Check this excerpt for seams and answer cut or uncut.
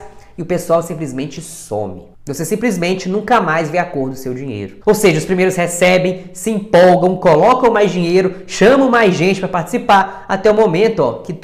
uncut